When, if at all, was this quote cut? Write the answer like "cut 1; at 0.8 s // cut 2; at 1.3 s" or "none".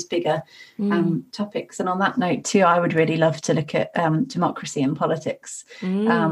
none